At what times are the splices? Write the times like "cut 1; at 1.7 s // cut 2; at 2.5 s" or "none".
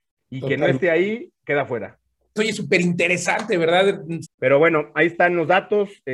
cut 1; at 2.4 s // cut 2; at 4.2 s